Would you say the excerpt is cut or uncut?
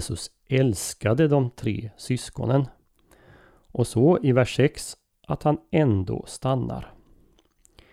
uncut